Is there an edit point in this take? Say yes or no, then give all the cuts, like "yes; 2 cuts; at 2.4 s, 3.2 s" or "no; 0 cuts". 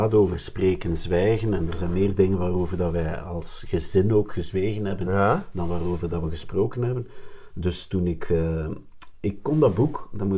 no; 0 cuts